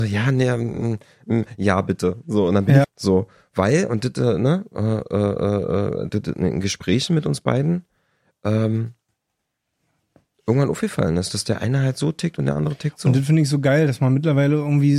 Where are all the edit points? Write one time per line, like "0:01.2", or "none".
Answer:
0:02.8